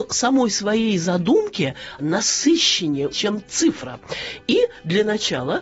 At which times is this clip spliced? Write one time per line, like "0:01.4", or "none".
0:02.0
0:03.1